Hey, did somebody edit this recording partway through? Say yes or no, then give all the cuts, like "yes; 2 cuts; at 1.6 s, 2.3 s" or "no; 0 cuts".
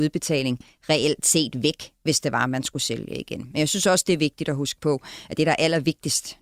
no; 0 cuts